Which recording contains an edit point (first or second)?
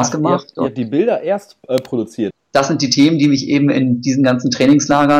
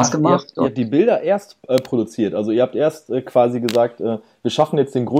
first